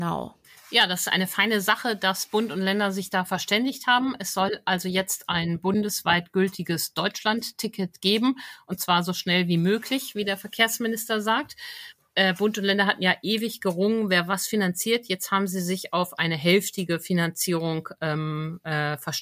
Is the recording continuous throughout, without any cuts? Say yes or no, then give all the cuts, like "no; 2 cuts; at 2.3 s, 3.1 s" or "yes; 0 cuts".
yes; 0 cuts